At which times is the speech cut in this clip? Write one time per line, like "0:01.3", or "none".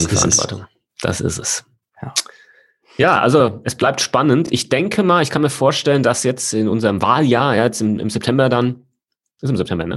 none